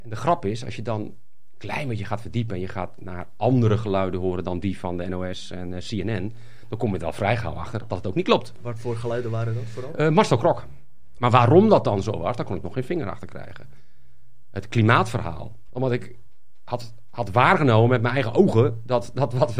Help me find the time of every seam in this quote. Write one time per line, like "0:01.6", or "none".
0:11.2
0:15.7